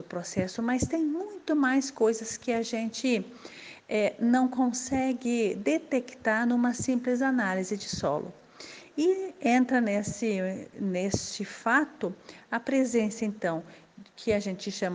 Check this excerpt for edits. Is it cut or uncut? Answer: uncut